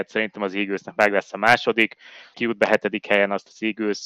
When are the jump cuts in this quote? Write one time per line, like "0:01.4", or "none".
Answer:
0:02.3